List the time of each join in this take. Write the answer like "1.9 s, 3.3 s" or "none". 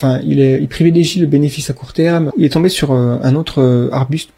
2.3 s